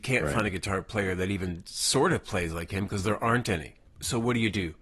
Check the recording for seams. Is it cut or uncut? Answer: uncut